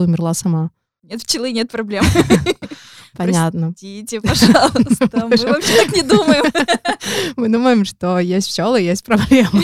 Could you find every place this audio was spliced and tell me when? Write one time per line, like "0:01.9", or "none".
0:01.0